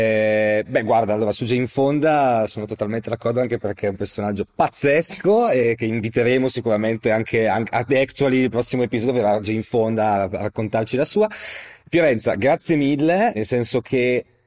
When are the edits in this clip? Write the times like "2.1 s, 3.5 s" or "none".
13.3 s